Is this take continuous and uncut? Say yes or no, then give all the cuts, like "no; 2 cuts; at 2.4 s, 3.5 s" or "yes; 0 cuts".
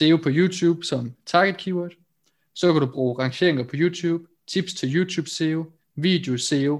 yes; 0 cuts